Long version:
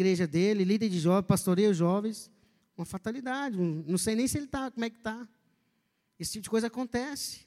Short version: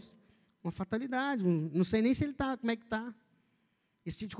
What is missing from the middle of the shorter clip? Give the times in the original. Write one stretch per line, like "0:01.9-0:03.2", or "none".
none